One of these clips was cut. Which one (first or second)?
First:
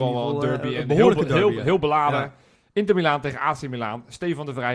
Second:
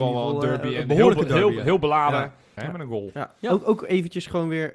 second